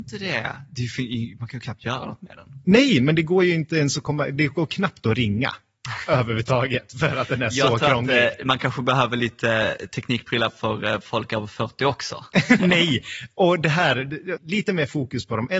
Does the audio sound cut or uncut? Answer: cut